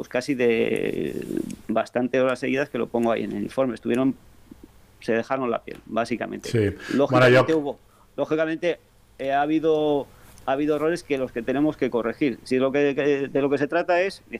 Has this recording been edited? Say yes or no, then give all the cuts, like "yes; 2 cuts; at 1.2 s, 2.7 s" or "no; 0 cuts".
no; 0 cuts